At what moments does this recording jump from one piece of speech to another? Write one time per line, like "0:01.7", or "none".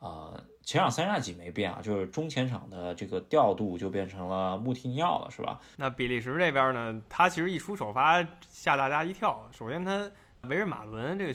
0:05.7